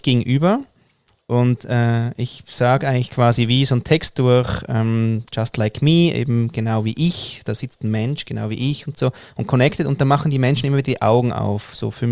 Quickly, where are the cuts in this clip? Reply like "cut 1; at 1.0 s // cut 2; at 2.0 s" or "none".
cut 1; at 7.4 s